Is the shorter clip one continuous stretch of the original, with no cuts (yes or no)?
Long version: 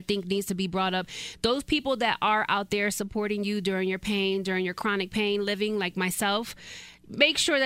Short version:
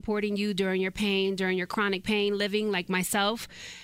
yes